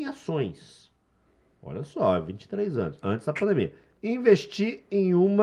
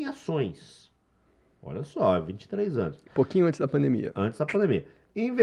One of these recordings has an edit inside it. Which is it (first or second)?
first